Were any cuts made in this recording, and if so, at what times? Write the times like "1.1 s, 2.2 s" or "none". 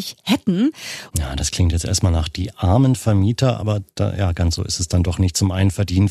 1.1 s